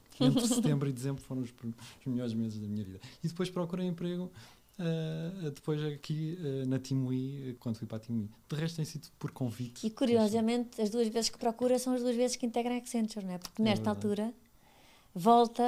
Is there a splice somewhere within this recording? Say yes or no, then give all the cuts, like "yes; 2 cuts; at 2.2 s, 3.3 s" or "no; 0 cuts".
yes; 1 cut; at 7.6 s